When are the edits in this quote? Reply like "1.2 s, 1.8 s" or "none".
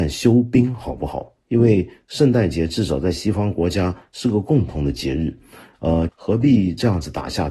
6.1 s